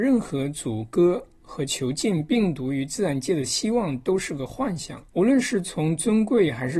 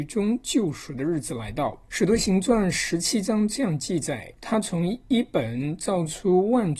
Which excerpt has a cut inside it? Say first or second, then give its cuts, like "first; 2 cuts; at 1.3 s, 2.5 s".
first; 1 cut; at 5.1 s